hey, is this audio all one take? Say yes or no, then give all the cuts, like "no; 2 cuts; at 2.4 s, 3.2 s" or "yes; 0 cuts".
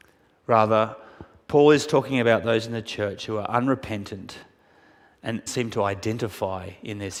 no; 1 cut; at 5.5 s